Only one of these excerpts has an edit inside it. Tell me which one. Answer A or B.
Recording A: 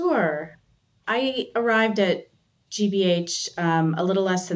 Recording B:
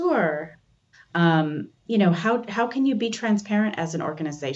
B